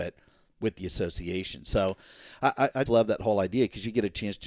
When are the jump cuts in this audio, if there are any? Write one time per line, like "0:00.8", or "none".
0:02.9